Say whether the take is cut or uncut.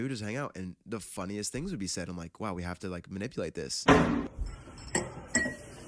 cut